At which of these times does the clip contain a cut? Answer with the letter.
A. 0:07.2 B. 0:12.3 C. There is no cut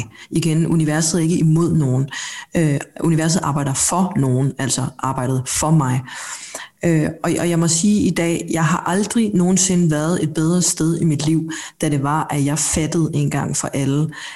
C